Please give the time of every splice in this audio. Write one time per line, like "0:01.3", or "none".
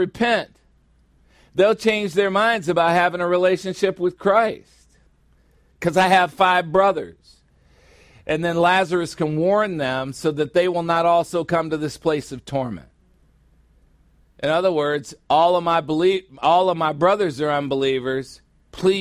0:05.7